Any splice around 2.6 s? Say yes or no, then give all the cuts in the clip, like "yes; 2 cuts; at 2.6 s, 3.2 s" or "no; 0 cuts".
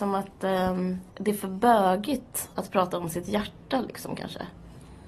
no; 1 cut; at 1.1 s